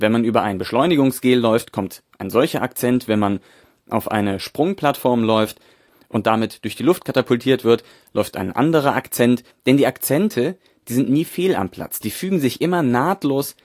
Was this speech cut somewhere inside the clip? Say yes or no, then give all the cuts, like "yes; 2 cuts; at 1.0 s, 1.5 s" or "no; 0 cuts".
yes; 1 cut; at 9.5 s